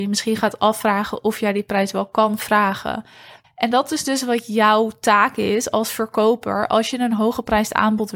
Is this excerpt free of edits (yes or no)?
no